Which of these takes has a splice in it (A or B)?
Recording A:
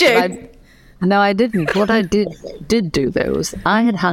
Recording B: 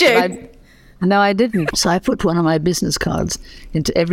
B